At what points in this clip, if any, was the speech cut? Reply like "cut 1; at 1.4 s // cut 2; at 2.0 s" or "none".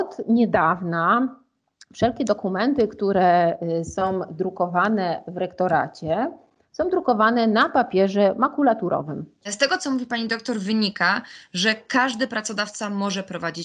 cut 1; at 9.4 s